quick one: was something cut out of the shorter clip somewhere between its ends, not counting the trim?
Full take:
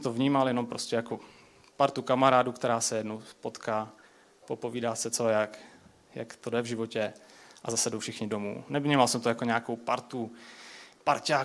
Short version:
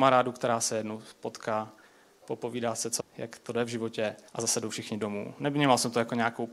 yes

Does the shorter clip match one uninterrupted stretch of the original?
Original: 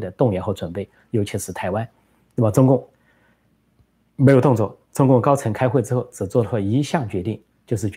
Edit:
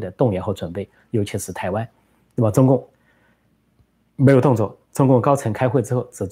yes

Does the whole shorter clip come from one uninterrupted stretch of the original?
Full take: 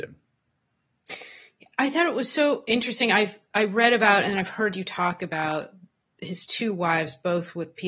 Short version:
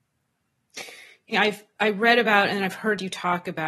no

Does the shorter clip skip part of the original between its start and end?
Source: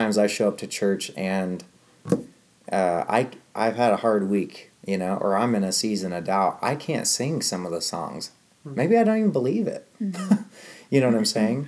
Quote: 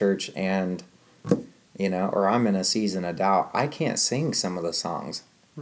yes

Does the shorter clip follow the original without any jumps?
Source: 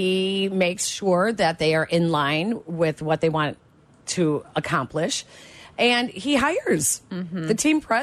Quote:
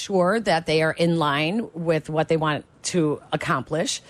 no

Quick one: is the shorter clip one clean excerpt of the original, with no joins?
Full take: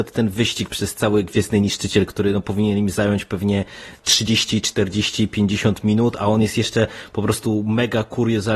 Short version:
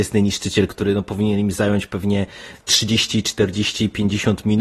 yes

